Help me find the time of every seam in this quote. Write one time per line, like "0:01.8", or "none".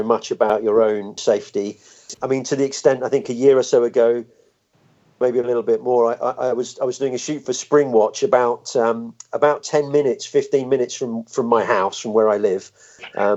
0:02.1